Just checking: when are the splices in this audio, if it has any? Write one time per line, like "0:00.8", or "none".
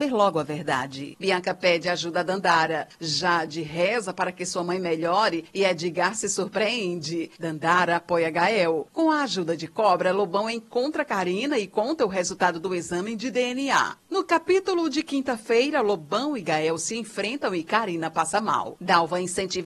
none